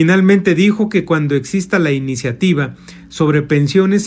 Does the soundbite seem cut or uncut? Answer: uncut